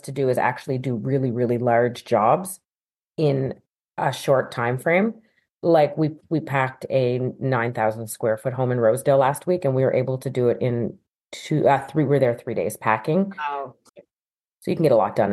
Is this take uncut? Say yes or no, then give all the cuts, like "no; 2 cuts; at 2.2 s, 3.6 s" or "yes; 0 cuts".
no; 1 cut; at 13.9 s